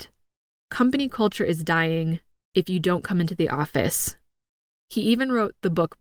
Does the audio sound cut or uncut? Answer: cut